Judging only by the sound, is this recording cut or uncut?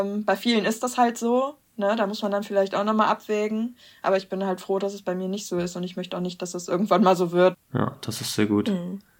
cut